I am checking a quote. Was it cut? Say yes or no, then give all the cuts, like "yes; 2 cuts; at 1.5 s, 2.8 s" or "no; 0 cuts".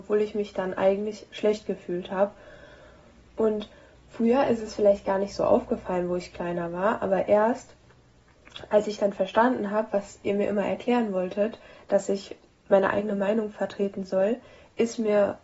no; 0 cuts